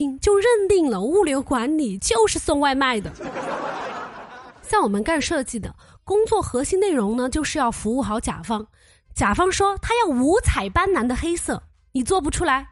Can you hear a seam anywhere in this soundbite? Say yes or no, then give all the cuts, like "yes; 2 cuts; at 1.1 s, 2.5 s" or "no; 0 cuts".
no; 0 cuts